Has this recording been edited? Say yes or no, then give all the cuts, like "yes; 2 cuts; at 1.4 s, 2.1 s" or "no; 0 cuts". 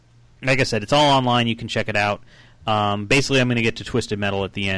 no; 0 cuts